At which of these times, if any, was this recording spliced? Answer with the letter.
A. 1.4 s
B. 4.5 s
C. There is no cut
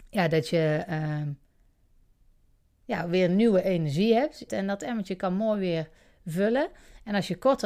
B